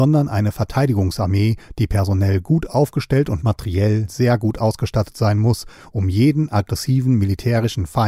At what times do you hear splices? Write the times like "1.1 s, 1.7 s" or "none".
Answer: none